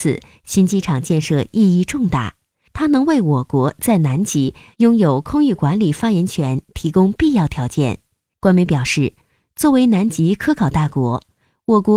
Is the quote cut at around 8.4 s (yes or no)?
yes